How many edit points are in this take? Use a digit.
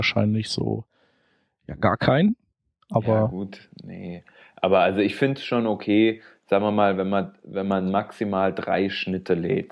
0